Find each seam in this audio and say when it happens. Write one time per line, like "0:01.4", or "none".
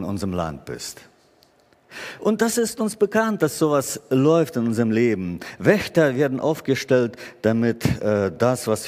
none